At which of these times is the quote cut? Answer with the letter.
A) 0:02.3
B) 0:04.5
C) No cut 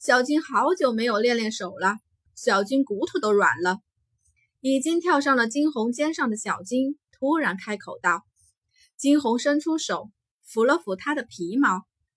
A